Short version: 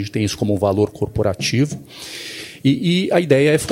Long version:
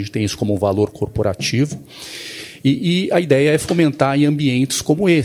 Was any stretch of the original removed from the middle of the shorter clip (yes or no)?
no